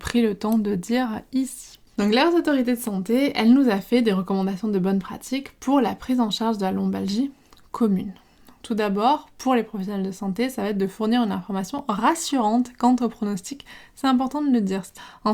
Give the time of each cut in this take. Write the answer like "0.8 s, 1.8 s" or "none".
1.9 s